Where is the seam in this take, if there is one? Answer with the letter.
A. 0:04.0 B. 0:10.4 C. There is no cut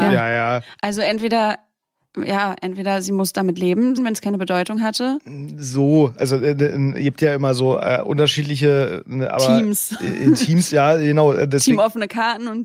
A